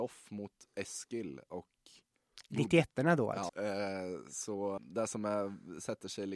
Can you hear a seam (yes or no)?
yes